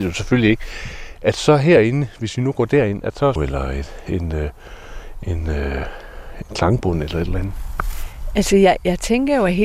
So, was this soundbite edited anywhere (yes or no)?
yes